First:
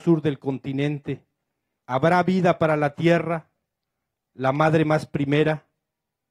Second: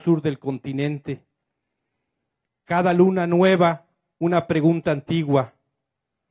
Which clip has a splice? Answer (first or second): first